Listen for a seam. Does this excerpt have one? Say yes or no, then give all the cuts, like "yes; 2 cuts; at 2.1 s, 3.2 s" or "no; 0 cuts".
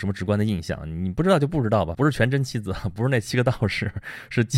yes; 1 cut; at 1.9 s